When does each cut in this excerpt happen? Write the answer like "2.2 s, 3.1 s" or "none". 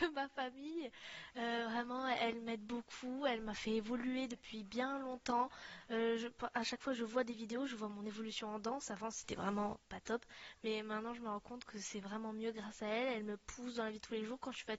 none